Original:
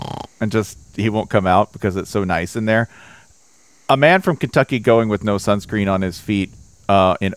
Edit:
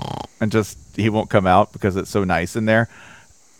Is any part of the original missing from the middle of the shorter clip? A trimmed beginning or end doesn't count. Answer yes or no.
no